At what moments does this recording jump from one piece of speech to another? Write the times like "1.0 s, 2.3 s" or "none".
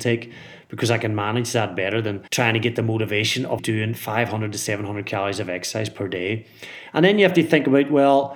2.3 s, 3.6 s